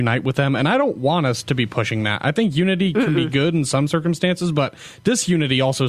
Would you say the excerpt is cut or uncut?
uncut